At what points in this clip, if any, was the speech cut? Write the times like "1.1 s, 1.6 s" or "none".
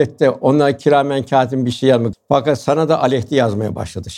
2.1 s

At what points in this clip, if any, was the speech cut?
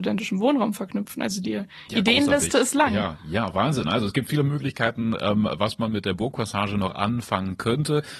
none

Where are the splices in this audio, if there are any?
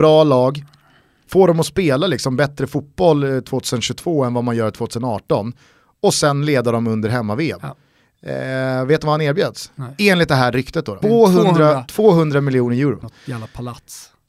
11.0 s, 13.0 s

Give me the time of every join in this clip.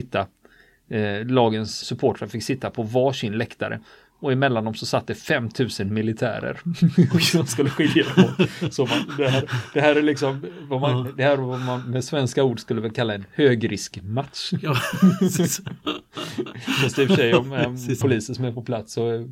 1.8 s, 18.0 s

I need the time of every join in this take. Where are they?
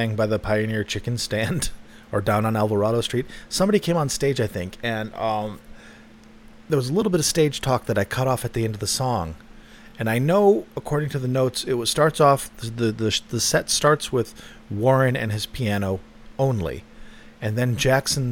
none

